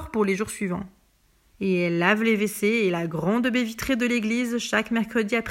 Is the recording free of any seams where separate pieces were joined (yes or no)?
no